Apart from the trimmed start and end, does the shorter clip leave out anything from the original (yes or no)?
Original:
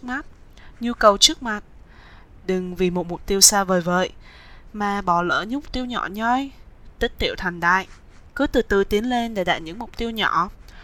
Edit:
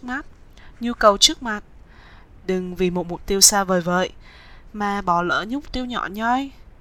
no